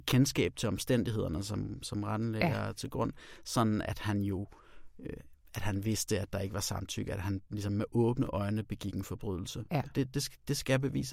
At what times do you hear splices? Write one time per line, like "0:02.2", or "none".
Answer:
none